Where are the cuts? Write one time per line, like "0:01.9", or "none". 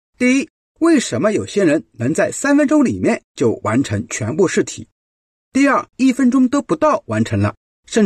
0:05.9